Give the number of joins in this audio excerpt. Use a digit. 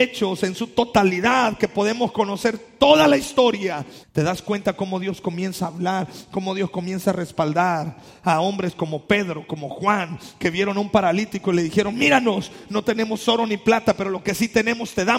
1